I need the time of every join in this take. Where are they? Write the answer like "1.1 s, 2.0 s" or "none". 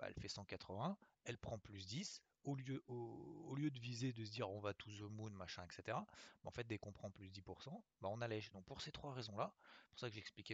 8.5 s